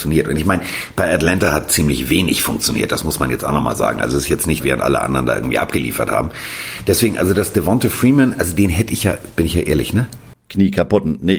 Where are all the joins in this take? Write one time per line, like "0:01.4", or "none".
0:04.6
0:10.3